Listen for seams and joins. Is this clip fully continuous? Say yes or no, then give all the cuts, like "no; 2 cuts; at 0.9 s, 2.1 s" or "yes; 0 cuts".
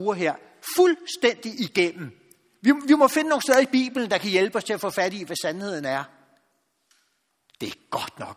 yes; 0 cuts